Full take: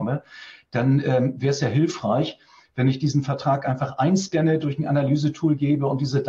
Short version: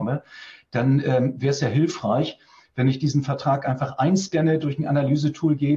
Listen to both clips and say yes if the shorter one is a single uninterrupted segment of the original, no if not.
yes